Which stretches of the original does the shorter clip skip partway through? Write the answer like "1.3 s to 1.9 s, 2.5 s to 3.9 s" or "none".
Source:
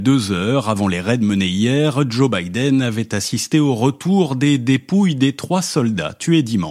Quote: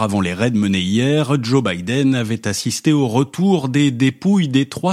none

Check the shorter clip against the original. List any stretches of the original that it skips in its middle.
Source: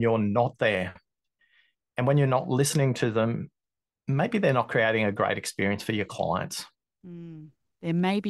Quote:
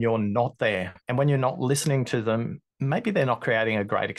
1.0 s to 1.9 s, 3.6 s to 4.0 s

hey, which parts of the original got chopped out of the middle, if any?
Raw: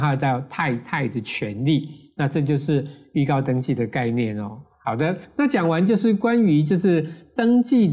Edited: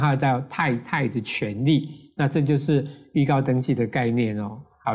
none

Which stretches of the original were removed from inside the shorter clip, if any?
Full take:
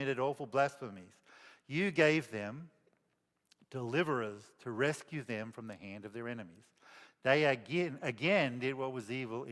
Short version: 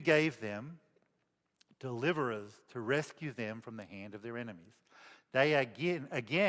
none

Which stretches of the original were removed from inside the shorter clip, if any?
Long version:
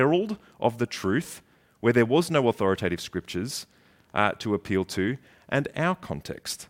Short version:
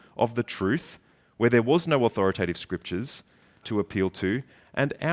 4.1 s to 4.4 s

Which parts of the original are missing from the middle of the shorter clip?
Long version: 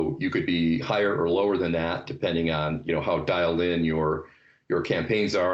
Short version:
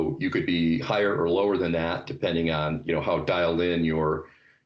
none

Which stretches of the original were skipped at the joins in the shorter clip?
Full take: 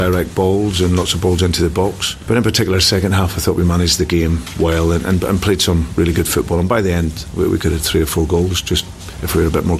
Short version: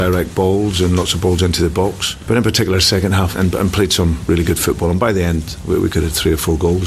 3.3 s to 5.0 s

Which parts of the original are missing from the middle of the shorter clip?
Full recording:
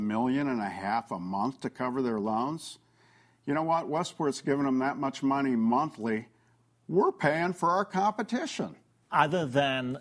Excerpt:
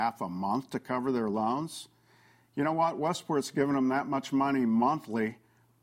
none

